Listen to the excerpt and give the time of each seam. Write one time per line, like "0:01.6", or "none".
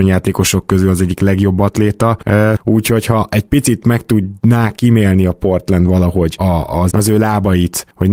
0:02.6
0:06.9

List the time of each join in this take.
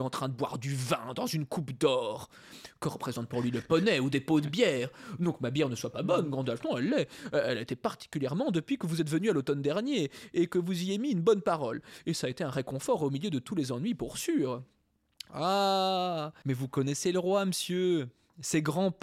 0:16.4

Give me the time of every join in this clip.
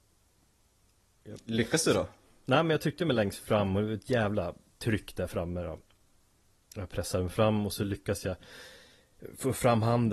none

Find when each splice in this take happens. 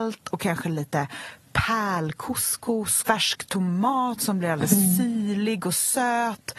0:03.0

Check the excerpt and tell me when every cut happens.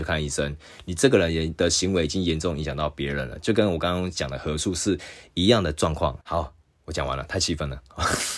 0:06.2

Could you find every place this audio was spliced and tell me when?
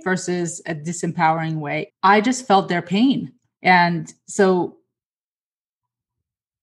0:01.9
0:03.4

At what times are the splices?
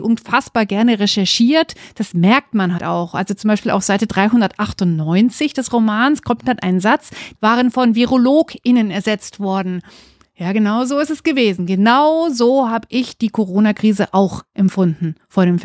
0:02.8
0:07.4

